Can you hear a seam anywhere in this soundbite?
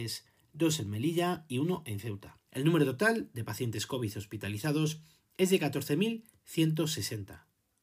yes; 1 cut; at 2.5 s

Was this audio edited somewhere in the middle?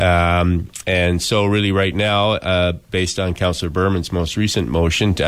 no; 0 cuts

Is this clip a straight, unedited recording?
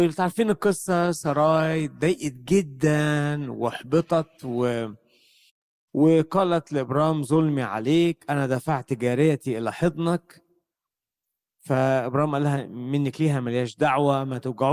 yes; 0 cuts

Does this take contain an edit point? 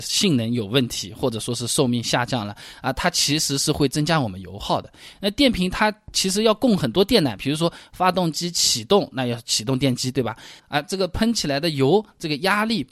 yes; 1 cut; at 10.6 s

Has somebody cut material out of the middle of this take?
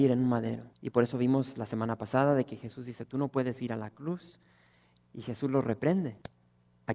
no; 0 cuts

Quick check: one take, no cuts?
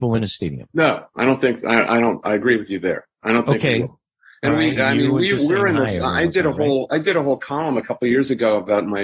no; 1 cut; at 4.8 s

